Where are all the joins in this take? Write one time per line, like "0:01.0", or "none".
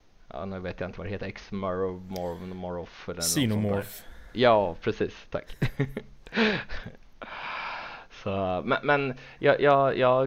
none